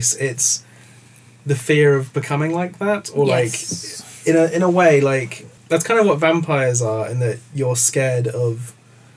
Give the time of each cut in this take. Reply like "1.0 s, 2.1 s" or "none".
5.6 s